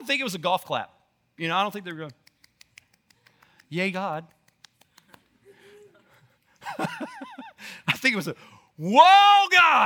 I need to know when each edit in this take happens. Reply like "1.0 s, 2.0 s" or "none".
none